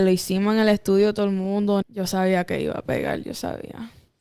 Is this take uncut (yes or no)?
no